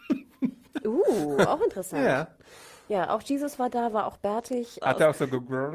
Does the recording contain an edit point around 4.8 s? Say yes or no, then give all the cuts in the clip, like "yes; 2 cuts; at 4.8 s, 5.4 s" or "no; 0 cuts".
yes; 1 cut; at 4.8 s